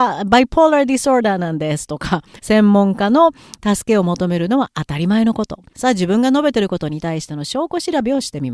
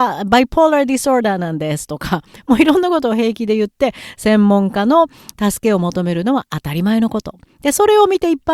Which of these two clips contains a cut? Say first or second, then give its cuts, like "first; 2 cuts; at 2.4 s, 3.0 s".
first; 2 cuts; at 2.4 s, 5.7 s